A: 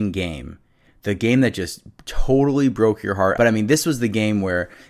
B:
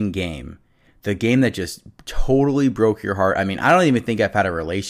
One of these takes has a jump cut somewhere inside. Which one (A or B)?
A